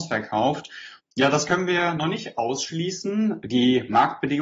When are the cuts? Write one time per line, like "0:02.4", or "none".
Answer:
0:01.0